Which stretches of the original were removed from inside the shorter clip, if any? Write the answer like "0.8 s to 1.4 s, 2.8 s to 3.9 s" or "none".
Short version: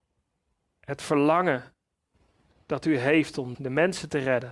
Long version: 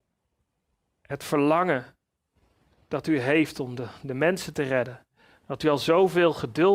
3.8 s to 4.0 s